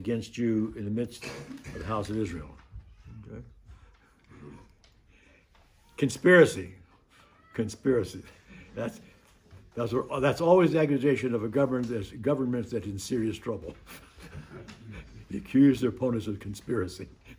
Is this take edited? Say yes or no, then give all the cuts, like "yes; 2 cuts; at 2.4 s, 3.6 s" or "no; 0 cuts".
no; 0 cuts